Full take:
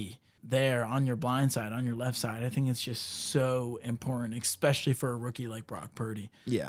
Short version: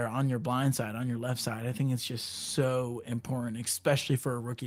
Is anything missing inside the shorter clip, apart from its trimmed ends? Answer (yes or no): no